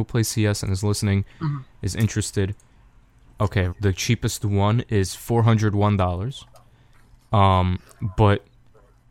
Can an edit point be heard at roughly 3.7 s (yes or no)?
yes